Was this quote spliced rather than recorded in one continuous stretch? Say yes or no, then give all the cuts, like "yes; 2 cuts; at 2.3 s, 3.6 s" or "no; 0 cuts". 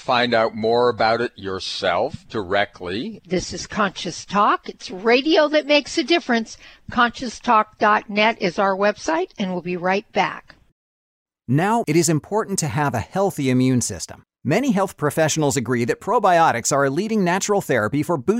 yes; 2 cuts; at 3.2 s, 11.8 s